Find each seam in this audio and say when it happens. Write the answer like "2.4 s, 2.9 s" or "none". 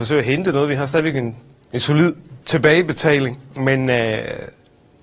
none